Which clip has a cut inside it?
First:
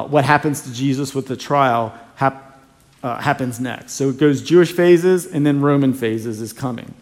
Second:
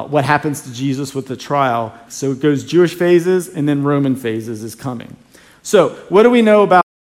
second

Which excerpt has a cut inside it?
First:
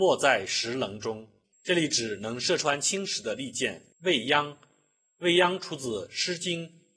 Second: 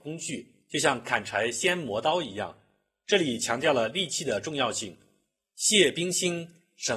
first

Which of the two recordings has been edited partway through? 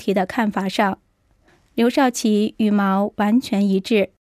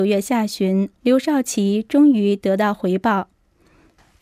second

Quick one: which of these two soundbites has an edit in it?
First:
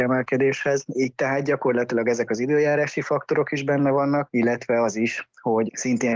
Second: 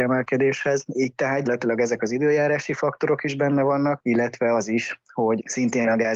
second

